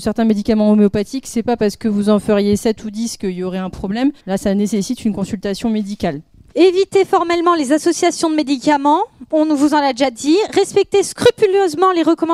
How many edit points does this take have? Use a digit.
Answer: 1